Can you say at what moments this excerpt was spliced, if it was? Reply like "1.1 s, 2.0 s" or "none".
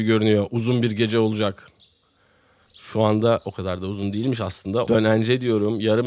4.9 s